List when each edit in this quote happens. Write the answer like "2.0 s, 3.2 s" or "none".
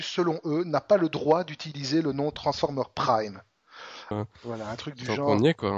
4.1 s